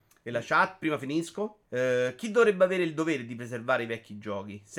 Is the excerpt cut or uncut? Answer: cut